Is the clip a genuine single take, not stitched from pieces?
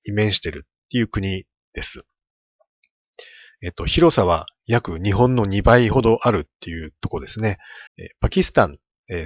no; 1 cut; at 7.9 s

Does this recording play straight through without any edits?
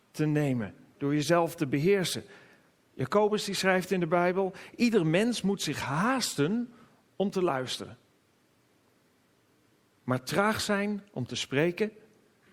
yes; 0 cuts

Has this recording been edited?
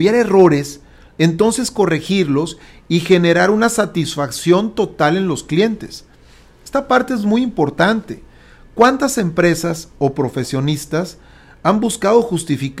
no; 0 cuts

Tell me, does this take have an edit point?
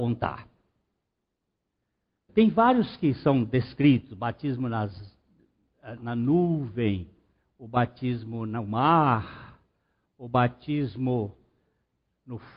yes; 2 cuts; at 2.3 s, 6.0 s

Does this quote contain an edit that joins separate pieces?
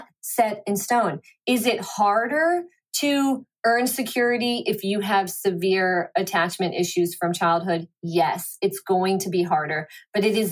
no; 0 cuts

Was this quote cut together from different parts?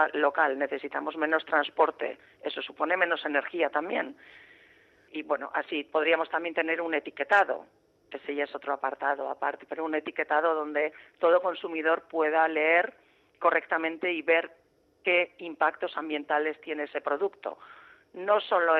no; 0 cuts

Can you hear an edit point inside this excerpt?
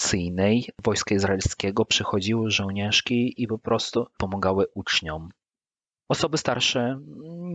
no; 0 cuts

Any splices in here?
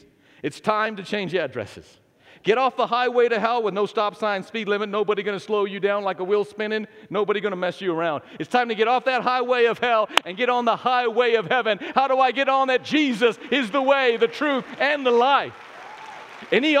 no; 0 cuts

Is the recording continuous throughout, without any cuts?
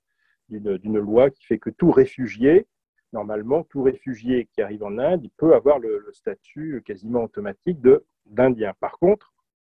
yes; 0 cuts

